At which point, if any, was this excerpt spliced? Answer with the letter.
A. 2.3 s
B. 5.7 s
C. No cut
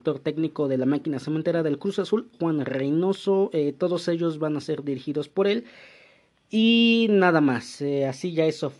A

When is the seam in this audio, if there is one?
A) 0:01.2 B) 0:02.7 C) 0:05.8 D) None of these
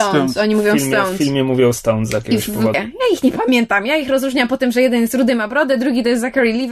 B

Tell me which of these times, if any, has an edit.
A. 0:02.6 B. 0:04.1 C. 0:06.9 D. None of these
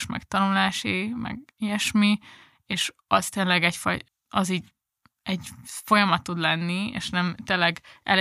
B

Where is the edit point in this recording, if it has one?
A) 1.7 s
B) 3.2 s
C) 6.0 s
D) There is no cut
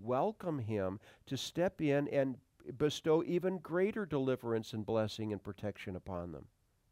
D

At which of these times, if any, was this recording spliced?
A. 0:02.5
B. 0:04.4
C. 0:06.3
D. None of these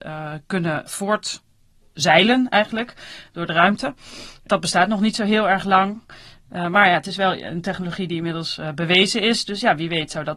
D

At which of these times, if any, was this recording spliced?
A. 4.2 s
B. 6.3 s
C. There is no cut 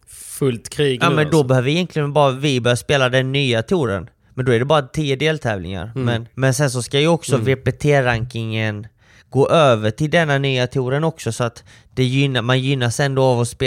B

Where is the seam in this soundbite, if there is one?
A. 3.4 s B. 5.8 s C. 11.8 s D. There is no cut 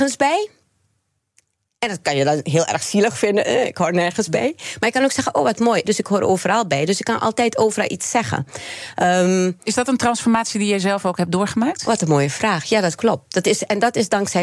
B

